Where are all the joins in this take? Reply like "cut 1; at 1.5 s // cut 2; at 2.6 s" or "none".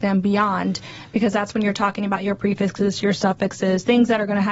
none